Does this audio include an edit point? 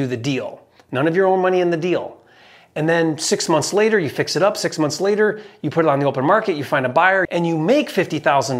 yes; 1 cut; at 7.3 s

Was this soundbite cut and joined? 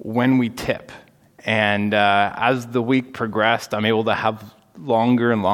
yes; 1 cut; at 1.4 s

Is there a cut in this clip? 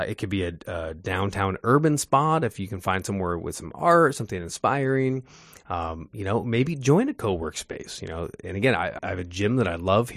yes; 1 cut; at 9.0 s

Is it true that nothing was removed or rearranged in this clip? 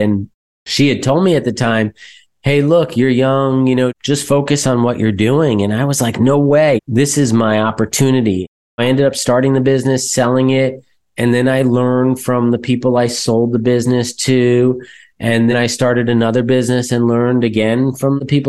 no; 2 cuts; at 6.8 s, 15.5 s

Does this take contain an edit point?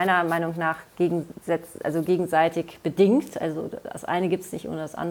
no; 0 cuts

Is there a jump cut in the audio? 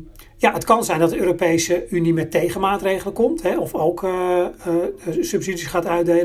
no; 0 cuts

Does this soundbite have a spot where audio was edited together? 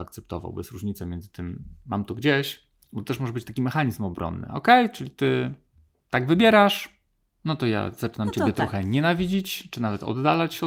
no; 0 cuts

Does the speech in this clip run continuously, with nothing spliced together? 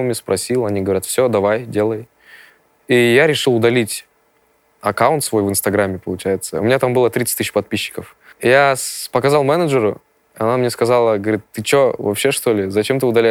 yes; 0 cuts

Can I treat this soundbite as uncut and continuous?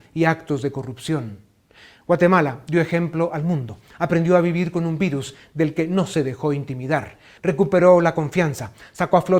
no; 2 cuts; at 1.9 s, 7.4 s

